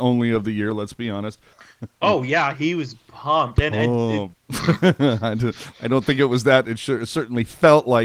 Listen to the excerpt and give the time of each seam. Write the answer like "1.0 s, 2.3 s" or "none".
1.5 s, 4.3 s